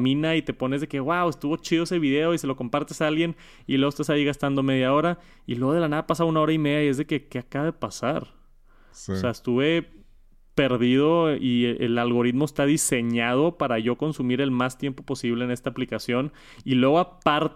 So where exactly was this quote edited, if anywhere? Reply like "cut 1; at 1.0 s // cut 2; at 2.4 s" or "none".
none